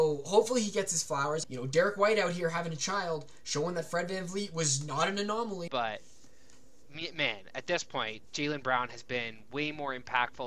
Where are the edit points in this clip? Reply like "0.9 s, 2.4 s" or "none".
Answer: 1.4 s, 5.7 s